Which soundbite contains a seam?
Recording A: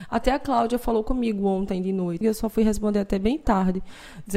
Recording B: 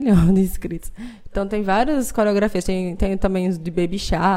A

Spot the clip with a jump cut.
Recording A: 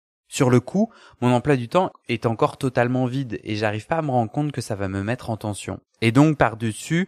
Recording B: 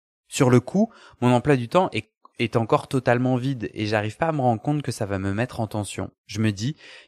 A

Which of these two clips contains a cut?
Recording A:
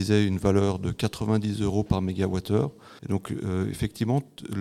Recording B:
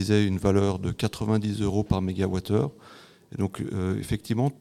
A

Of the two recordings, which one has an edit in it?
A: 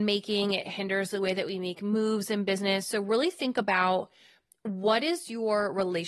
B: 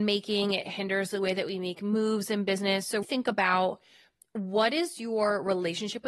B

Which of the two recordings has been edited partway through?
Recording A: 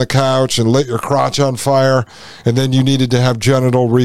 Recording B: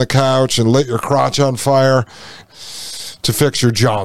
B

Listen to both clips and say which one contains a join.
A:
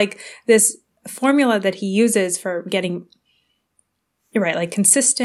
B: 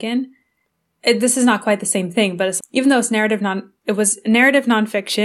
B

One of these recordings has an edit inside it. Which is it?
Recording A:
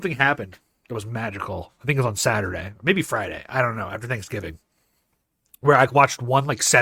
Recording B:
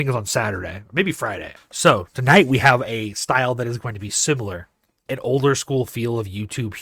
B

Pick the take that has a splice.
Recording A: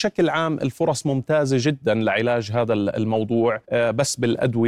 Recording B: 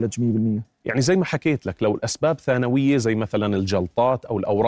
A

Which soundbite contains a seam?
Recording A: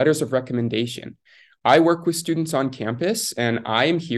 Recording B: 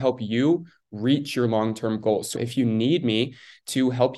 B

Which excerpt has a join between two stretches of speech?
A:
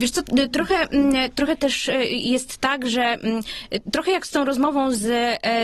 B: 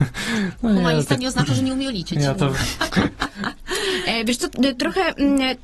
B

